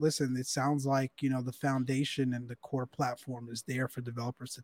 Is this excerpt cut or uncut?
uncut